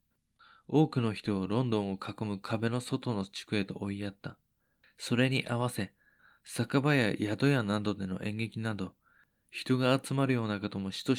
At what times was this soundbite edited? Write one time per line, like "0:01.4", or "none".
none